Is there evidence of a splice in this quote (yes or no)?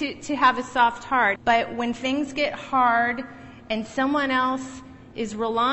yes